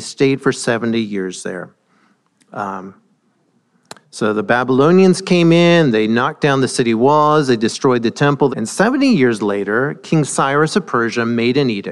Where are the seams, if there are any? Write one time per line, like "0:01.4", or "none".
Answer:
0:08.5